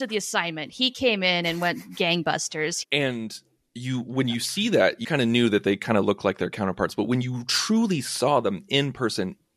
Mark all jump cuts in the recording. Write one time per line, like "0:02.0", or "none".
0:02.8
0:05.0